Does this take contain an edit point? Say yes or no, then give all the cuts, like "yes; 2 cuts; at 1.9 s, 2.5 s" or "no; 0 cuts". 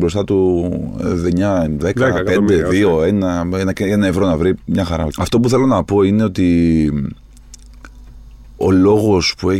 yes; 2 cuts; at 5.1 s, 8.6 s